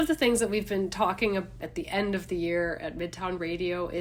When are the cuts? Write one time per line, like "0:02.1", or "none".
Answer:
0:01.6